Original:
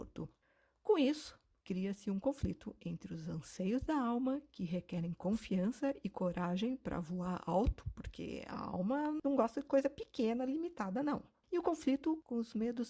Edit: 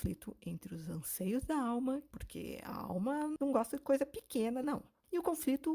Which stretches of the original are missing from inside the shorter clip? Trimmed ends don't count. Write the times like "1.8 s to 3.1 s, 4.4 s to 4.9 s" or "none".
4.5 s to 7.9 s, 10.5 s to 11.0 s